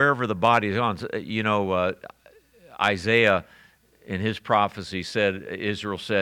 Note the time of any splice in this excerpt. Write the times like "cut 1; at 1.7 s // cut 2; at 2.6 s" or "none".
none